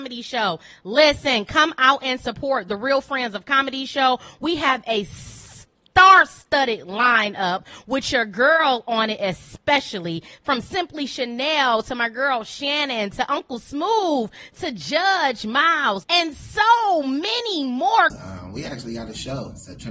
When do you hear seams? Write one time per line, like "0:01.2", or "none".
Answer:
0:16.0
0:18.1